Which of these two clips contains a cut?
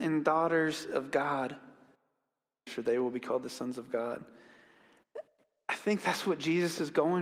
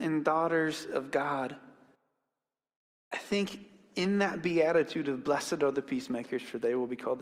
first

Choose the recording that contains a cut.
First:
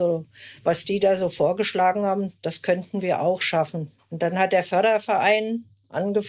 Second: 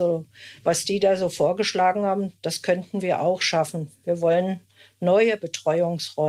first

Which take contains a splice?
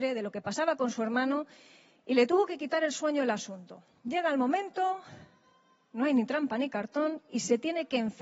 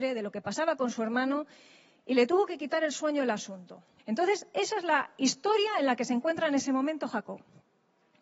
second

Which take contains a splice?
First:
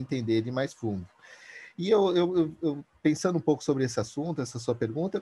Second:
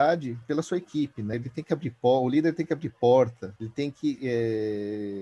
second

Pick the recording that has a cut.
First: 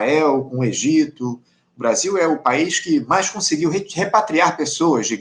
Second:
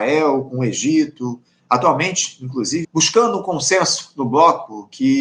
second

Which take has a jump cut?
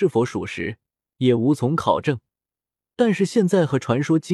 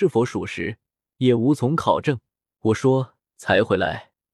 second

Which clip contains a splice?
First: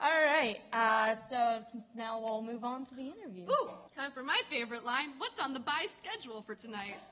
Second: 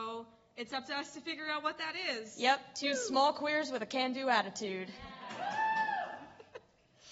first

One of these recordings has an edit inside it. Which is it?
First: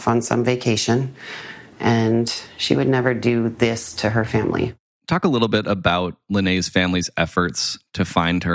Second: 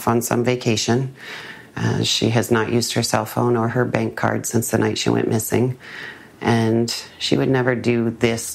first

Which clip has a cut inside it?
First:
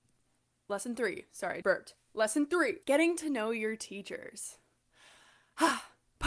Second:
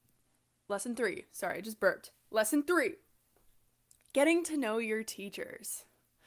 first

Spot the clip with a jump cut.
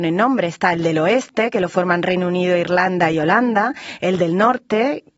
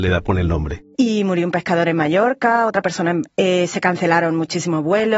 second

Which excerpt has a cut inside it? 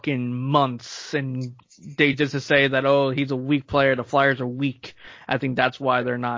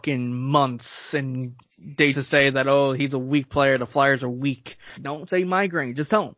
second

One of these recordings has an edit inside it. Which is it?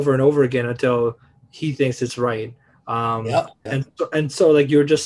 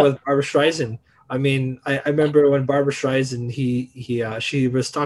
first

